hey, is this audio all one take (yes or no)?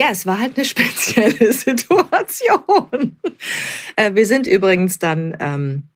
yes